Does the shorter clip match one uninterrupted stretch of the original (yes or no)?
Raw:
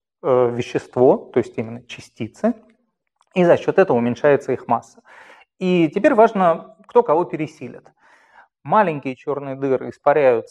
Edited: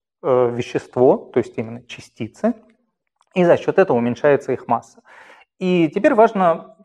yes